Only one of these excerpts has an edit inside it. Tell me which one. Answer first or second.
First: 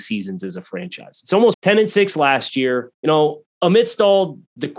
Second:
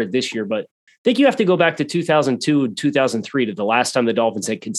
first